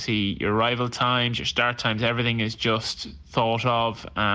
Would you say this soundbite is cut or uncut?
uncut